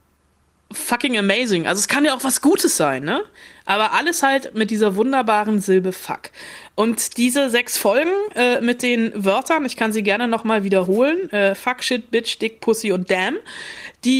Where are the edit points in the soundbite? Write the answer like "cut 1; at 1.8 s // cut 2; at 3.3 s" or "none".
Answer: none